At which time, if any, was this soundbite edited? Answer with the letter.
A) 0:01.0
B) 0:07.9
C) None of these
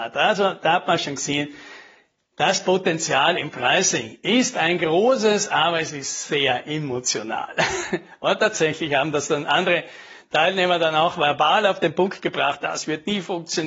B